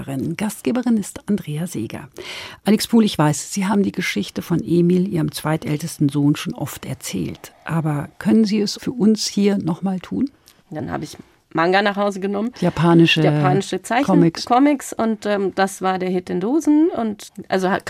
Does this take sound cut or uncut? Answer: cut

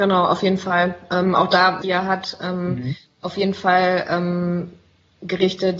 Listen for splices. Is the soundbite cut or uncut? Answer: cut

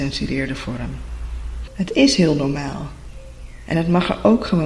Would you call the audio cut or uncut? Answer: cut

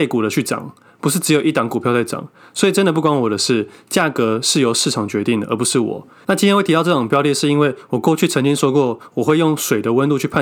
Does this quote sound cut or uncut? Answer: uncut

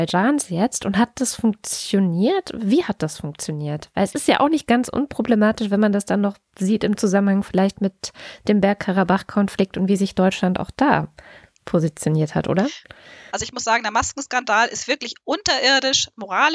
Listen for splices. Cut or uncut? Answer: cut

